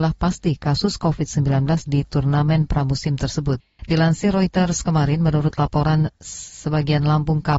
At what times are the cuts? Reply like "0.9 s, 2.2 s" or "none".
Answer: 3.8 s